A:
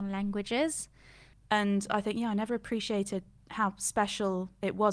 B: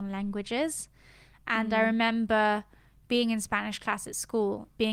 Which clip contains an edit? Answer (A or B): A